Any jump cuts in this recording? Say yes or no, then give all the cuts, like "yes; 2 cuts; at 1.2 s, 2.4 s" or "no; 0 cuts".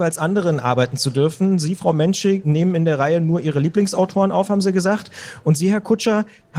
no; 0 cuts